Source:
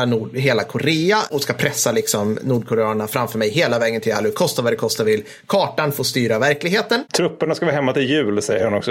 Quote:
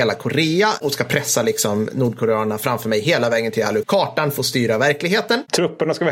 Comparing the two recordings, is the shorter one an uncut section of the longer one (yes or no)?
no